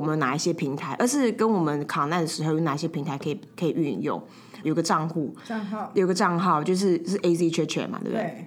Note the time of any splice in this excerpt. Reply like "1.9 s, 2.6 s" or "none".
1.0 s, 4.6 s